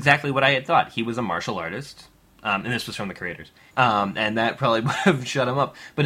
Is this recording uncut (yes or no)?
no